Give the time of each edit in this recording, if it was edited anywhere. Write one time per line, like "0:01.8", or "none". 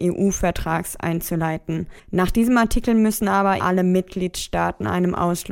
0:02.0
0:03.6